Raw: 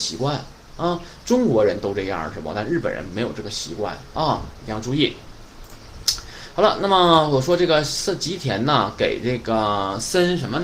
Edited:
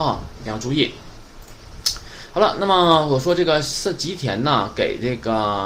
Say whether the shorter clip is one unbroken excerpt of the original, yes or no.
yes